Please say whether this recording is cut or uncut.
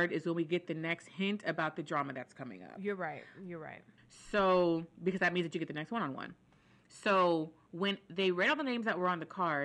cut